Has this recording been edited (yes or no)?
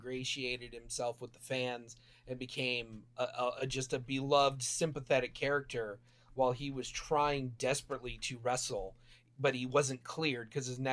no